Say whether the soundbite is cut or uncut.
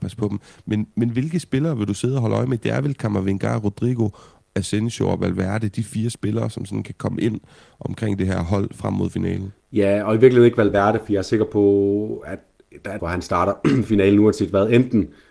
cut